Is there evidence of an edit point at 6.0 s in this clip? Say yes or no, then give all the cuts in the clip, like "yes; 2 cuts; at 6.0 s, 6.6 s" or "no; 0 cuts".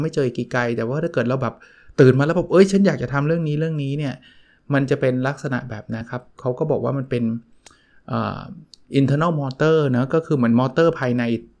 yes; 1 cut; at 6.0 s